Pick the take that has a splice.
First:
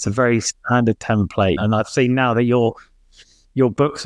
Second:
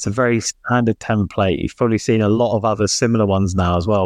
first; 1 cut; at 1.6 s

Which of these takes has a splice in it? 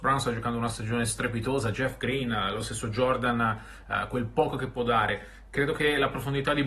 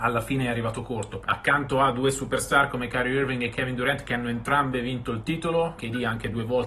second; 2 cuts; at 1.2 s, 5.8 s

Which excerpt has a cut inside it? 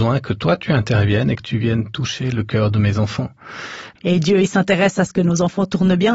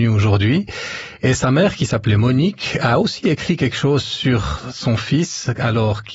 first; 1 cut; at 4.0 s

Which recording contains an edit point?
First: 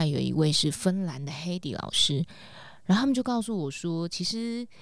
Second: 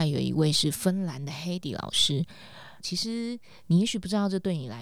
second; 1 cut; at 2.8 s

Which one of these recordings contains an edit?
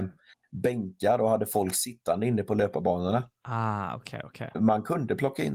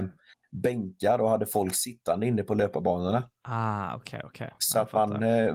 first; 1 cut; at 4.5 s

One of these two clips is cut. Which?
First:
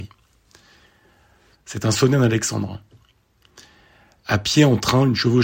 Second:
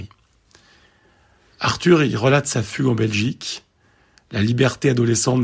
first; 1 cut; at 1.5 s

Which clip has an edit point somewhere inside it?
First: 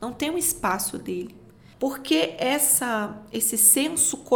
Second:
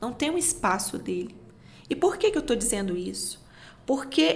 first; 1 cut; at 1.7 s

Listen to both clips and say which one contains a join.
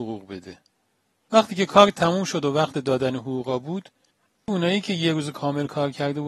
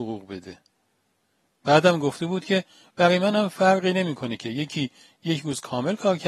first; 1 cut; at 1.2 s

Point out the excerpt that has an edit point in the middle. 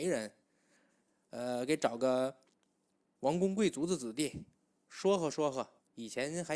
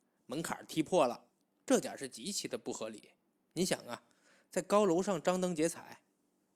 second; 1 cut; at 1.6 s

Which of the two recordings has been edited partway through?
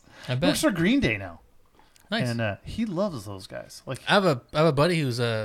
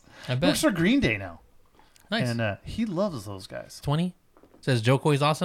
second; 1 cut; at 3.8 s

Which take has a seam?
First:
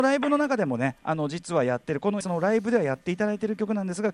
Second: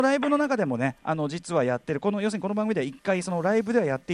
first; 1 cut; at 2.2 s

